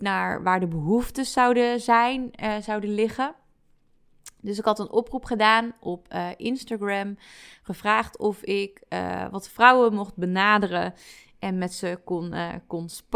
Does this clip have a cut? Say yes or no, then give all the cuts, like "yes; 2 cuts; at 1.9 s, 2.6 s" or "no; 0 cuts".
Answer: no; 0 cuts